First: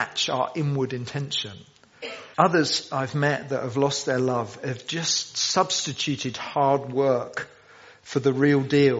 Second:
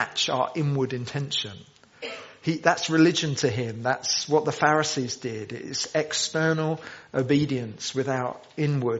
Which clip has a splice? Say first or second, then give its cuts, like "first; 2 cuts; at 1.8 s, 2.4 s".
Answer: first; 1 cut; at 2.3 s